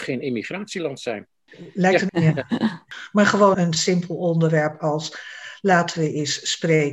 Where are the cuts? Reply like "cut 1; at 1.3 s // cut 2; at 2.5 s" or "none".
cut 1; at 2.1 s // cut 2; at 3.5 s